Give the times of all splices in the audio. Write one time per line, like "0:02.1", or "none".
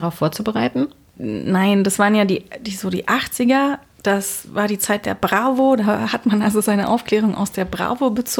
none